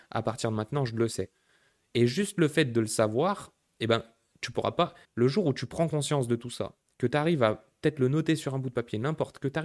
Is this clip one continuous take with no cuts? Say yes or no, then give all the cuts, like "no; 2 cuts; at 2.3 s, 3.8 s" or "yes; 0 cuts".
no; 1 cut; at 5.0 s